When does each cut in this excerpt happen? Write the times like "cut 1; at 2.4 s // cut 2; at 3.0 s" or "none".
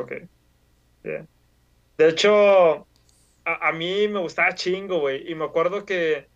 none